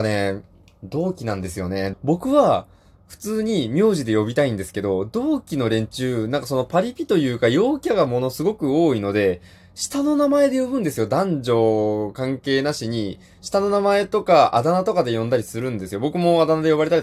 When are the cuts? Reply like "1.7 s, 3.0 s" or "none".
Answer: 1.9 s